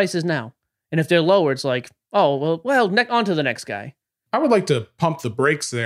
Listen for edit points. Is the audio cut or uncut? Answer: uncut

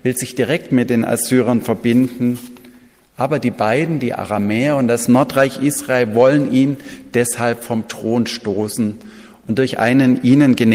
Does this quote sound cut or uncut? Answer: uncut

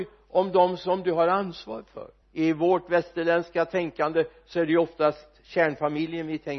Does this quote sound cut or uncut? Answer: cut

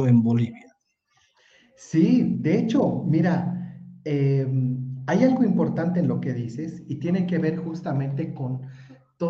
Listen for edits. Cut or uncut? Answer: uncut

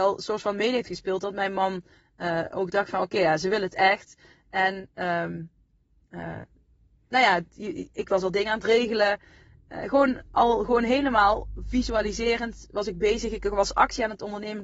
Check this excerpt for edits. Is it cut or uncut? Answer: uncut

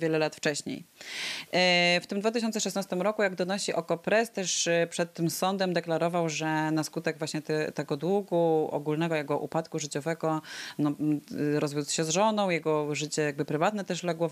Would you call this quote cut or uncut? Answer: uncut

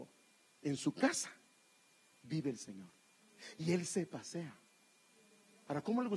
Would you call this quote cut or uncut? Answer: uncut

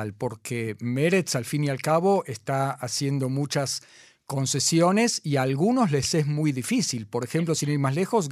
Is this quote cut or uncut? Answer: uncut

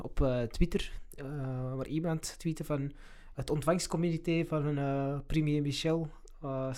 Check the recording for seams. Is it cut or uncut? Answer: uncut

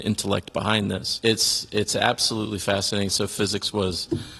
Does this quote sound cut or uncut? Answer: cut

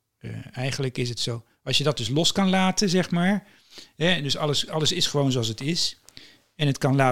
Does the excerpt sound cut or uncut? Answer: uncut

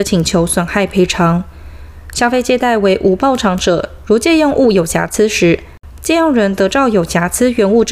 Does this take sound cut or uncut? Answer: uncut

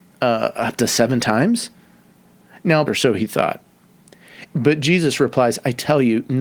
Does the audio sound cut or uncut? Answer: cut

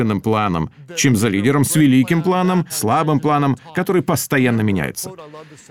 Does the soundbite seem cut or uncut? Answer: cut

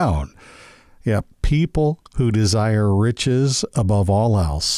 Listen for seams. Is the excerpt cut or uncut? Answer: uncut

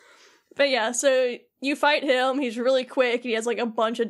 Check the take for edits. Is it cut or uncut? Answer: uncut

